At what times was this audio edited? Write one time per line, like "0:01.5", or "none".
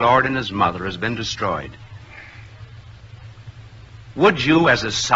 0:04.1